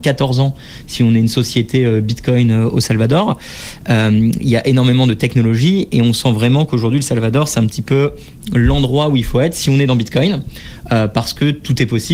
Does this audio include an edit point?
no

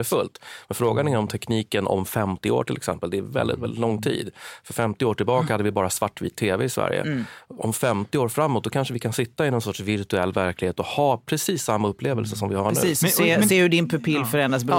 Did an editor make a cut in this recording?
no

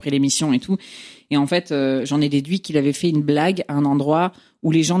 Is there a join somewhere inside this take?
no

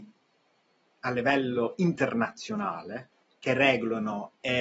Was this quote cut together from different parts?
no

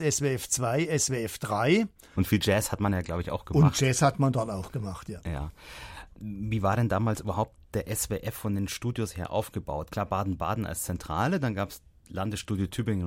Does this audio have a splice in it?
yes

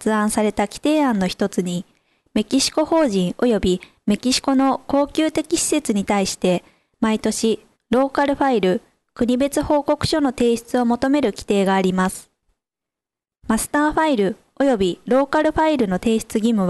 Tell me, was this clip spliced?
yes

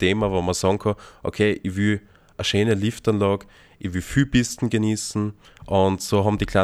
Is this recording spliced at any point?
yes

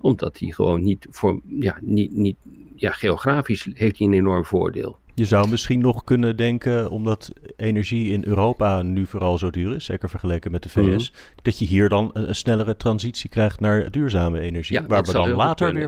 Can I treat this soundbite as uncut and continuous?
no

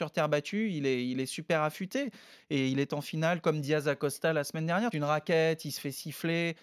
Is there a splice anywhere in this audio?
yes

